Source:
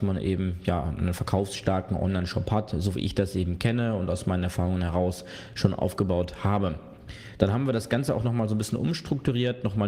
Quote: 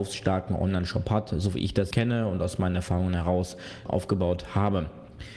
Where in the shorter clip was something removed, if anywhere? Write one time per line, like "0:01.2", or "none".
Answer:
0:01.9
0:03.9